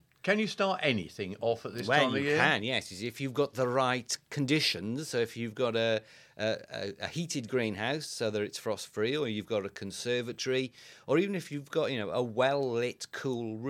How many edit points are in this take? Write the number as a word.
zero